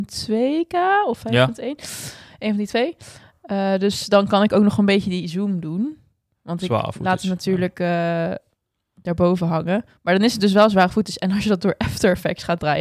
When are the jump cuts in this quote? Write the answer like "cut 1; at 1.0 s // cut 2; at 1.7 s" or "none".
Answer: none